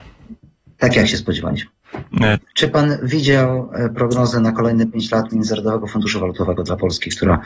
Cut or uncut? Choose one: cut